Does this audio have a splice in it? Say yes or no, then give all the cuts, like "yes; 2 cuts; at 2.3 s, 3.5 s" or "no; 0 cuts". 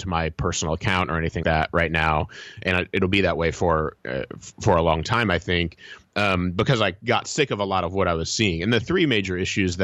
yes; 1 cut; at 1.4 s